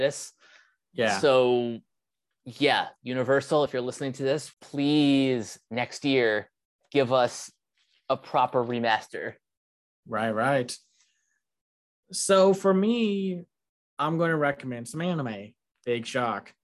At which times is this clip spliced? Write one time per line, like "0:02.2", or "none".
none

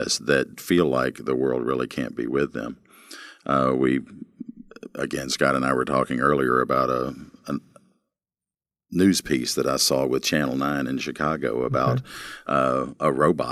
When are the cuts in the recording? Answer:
none

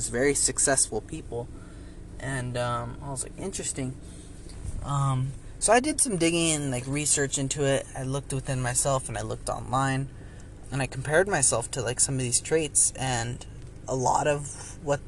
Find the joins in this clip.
0:10.6

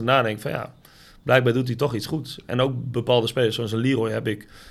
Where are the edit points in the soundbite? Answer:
none

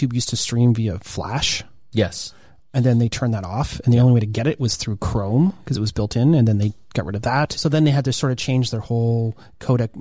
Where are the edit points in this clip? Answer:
0:07.6

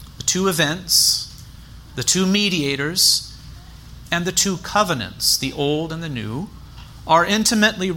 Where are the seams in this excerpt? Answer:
none

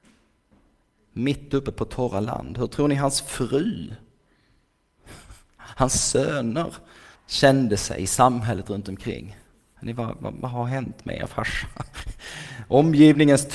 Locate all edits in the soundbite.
0:07.2

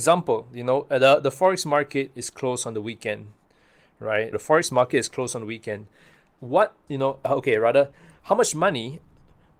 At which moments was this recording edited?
0:04.3
0:06.9

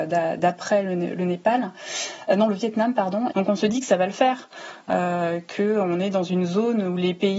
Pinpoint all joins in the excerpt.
0:03.3

